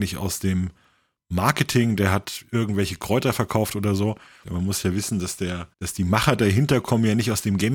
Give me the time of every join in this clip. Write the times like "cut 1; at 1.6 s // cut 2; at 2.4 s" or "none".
cut 1; at 4.4 s // cut 2; at 5.7 s